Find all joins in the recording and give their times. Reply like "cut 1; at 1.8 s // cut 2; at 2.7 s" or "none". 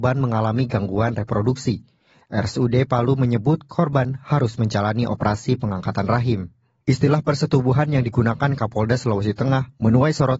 none